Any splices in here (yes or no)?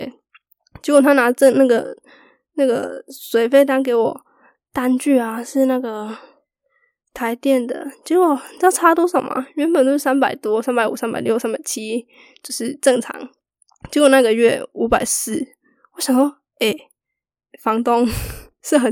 no